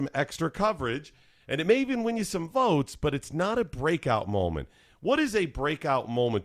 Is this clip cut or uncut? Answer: uncut